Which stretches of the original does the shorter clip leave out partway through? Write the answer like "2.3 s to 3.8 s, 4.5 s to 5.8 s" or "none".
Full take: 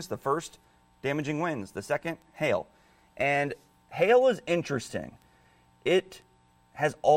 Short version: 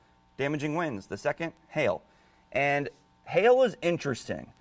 none

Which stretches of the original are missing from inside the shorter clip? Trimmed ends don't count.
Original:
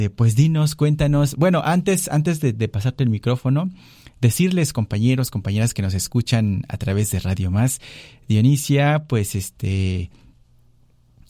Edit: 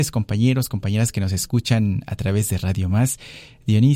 none

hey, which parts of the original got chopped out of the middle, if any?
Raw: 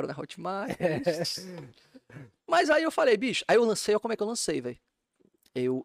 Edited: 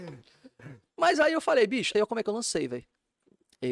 3.4 s to 3.9 s

